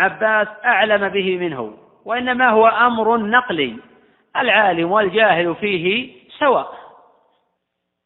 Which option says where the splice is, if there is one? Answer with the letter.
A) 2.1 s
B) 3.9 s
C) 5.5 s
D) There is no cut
D